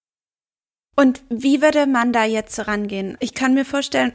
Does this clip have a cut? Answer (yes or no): yes